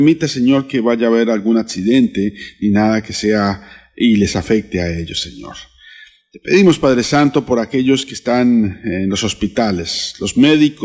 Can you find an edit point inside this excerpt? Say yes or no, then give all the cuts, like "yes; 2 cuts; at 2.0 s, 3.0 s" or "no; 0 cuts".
no; 0 cuts